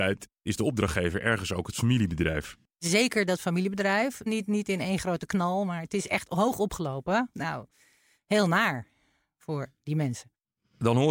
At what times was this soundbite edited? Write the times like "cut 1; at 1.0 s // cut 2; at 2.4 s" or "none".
cut 1; at 4.3 s // cut 2; at 7.3 s